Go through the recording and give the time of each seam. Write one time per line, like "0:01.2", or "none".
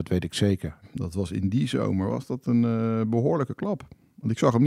none